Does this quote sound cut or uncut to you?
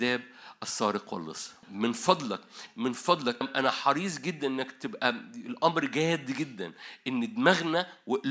cut